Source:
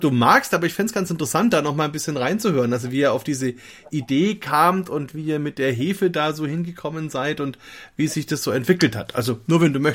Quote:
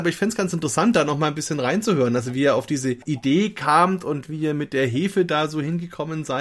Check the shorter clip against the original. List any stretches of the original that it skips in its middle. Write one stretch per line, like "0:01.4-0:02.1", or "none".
0:03.6-0:03.9